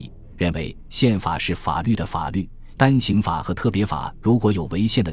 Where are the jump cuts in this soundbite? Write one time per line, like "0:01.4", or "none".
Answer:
0:02.7

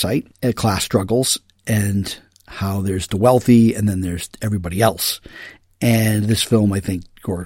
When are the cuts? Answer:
none

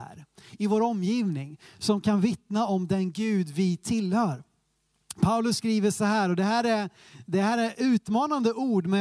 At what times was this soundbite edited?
none

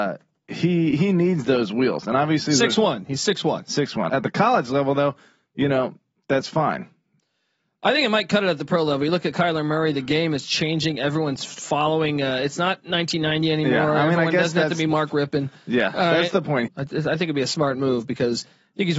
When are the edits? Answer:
0:04.1
0:16.7

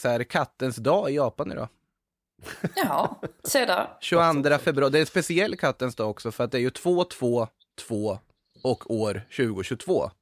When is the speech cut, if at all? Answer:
none

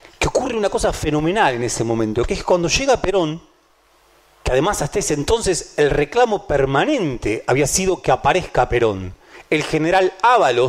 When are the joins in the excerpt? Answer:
none

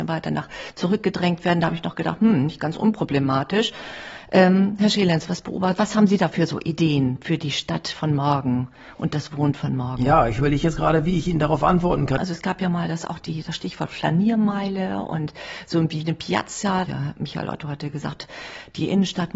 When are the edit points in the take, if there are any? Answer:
0:12.2
0:16.9

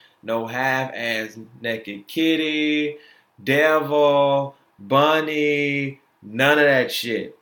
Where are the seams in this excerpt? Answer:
none

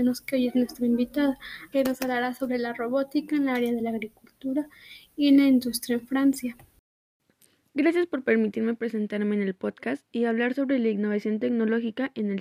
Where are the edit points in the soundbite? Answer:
0:01.7

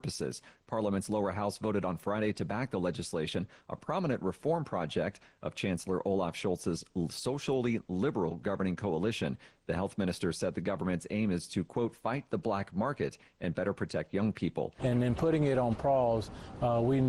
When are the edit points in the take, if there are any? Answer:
0:14.8

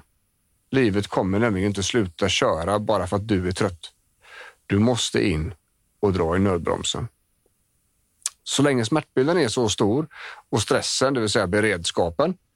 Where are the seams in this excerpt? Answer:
none

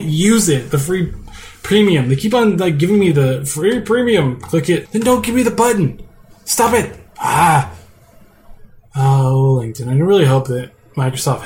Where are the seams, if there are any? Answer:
0:04.8
0:07.1

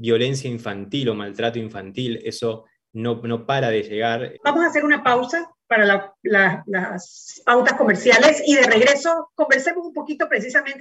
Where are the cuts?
0:04.3

